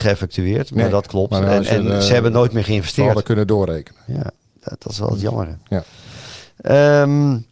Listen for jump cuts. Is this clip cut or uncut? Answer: uncut